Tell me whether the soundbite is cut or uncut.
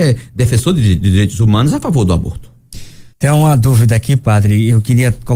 cut